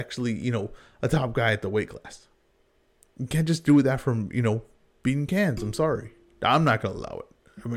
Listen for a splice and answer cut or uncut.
uncut